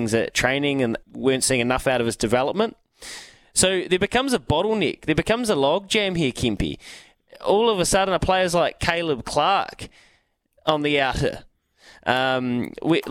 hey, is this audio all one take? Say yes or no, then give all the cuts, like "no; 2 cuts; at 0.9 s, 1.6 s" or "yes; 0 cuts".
no; 1 cut; at 1.0 s